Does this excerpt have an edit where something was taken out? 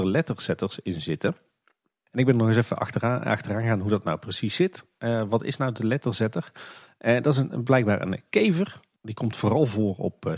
no; 0 cuts

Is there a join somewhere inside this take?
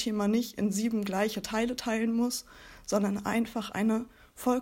no; 0 cuts

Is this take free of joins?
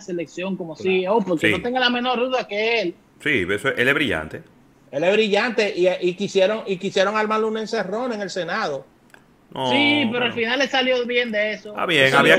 yes; 0 cuts

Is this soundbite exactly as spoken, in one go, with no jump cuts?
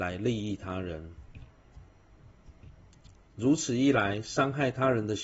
no; 1 cut; at 3.2 s

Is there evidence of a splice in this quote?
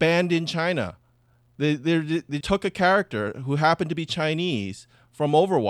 yes; 1 cut; at 2.4 s

